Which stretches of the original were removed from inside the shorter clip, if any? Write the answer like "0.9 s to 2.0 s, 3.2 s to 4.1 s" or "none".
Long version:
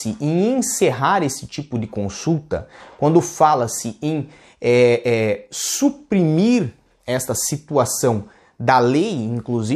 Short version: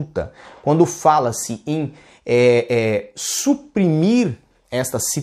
none